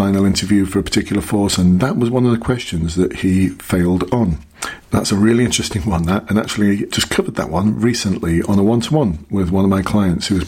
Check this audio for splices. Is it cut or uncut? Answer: cut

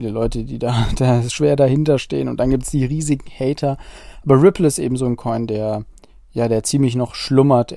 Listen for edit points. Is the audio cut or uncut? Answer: uncut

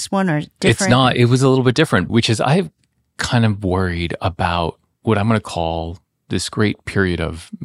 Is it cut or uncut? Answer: cut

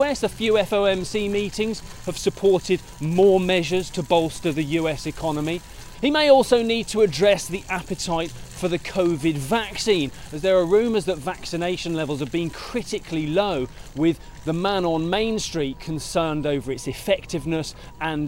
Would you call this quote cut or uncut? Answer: cut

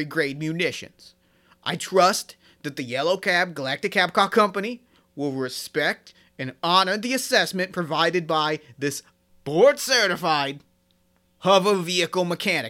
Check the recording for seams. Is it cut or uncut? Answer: uncut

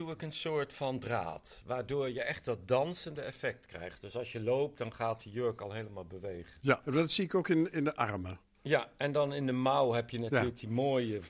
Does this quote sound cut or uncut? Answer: uncut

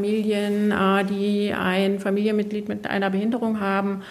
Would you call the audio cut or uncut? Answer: uncut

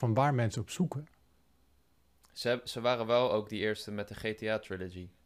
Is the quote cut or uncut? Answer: uncut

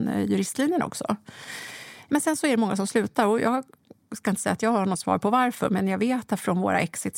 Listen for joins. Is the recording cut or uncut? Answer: uncut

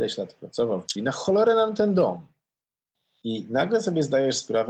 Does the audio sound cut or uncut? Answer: cut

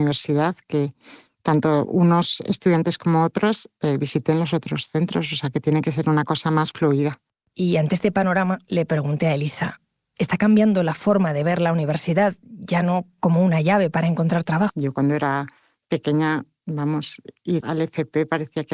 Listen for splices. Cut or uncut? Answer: cut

